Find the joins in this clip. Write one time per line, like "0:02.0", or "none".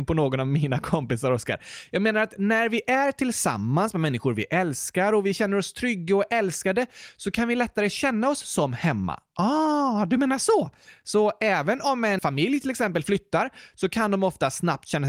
0:12.2